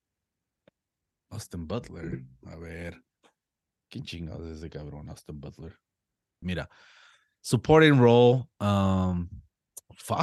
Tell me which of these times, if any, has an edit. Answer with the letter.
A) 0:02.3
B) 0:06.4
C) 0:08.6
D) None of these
B